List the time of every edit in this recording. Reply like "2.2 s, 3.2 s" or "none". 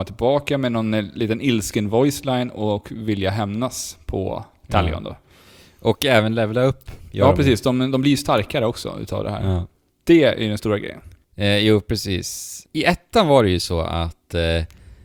none

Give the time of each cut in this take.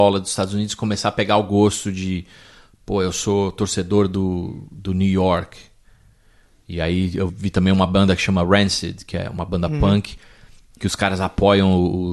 7.3 s

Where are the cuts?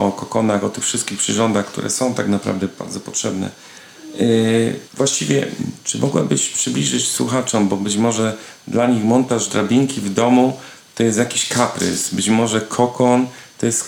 4.9 s

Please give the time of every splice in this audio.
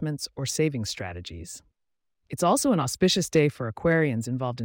none

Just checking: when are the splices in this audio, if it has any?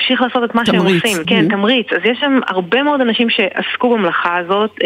1.2 s

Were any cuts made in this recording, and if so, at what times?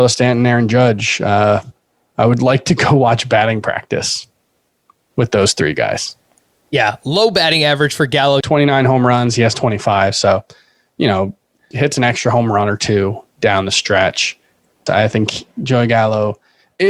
8.4 s, 11.7 s, 14.9 s

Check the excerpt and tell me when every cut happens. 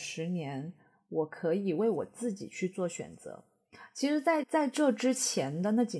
4.4 s

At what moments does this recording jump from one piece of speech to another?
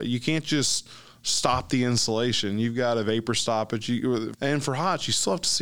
4.3 s

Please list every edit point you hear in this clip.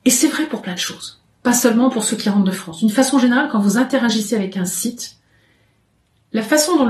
none

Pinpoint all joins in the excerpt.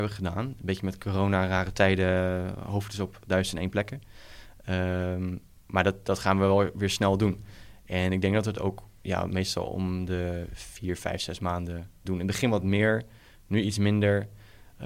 12.0 s

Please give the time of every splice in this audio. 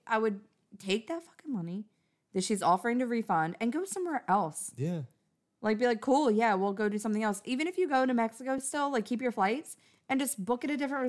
none

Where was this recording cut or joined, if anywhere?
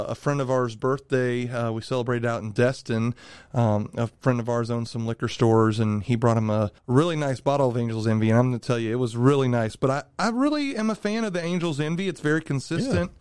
6.8 s

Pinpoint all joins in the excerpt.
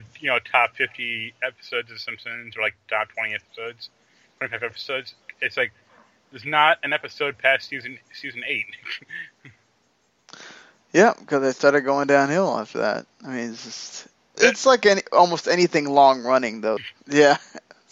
14.4 s, 16.8 s

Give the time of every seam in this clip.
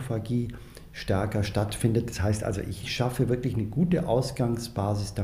none

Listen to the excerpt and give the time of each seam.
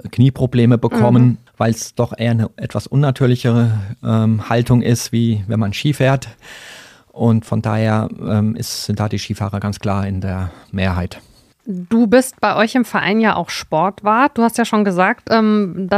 1.5 s

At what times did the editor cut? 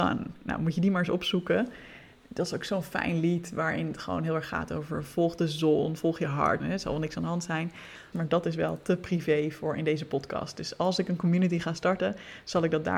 6.6 s, 8.1 s

